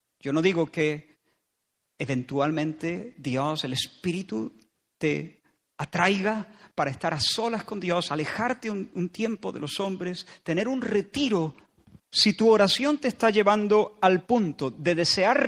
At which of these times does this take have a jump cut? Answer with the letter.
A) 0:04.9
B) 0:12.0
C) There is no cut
B